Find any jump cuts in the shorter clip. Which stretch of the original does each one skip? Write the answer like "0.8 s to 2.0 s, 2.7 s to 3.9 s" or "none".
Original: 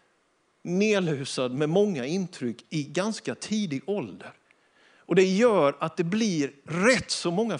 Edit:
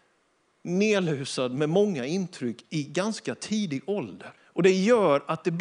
4.4 s to 4.9 s